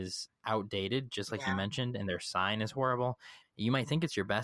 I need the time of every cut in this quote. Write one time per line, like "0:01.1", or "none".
0:03.4